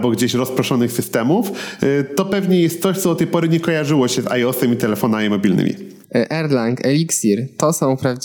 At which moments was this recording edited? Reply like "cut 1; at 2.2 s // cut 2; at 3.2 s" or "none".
cut 1; at 6.0 s